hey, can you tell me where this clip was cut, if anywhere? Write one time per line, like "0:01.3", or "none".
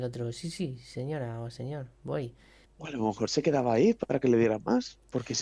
0:02.7